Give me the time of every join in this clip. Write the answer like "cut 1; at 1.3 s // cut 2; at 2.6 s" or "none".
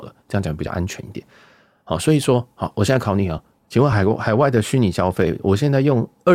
none